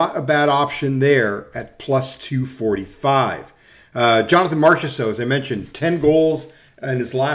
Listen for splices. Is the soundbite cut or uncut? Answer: uncut